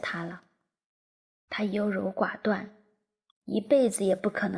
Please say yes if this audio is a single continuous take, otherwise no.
no